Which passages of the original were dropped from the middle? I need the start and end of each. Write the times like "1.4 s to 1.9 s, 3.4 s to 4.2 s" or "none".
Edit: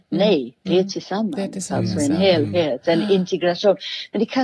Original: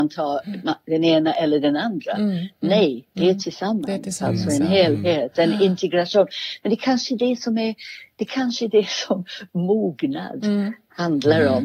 none